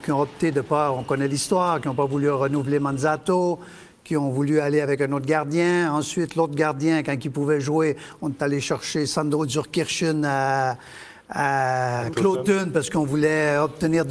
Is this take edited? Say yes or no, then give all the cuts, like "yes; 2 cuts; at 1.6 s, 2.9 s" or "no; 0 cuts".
no; 0 cuts